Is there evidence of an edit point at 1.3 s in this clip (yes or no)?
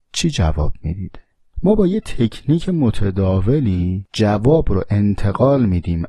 no